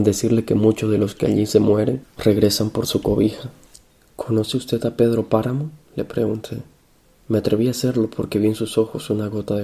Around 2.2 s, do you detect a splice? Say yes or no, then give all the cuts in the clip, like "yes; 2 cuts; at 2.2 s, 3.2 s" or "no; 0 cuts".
yes; 1 cut; at 2.2 s